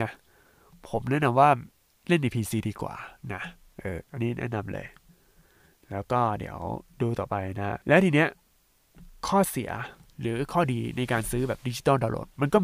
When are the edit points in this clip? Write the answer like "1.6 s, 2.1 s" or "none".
4.0 s, 7.8 s

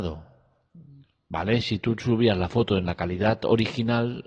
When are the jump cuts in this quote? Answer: none

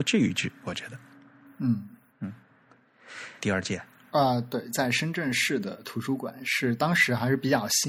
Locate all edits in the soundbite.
3.4 s

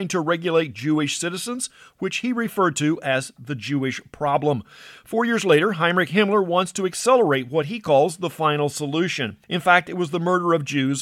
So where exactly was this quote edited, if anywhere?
9.4 s

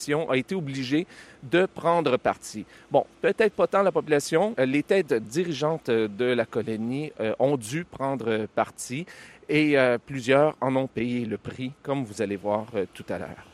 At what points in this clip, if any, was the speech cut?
4.6 s

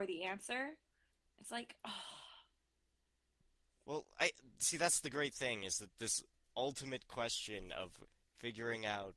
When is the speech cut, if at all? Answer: none

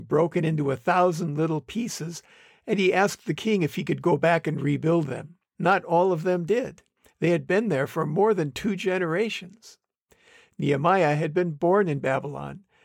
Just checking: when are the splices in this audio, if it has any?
5.6 s

